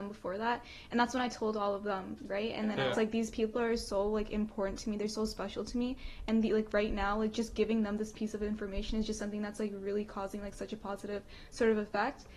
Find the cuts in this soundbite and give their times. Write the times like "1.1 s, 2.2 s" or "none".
2.9 s